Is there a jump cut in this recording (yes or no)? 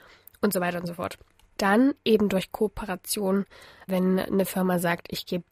yes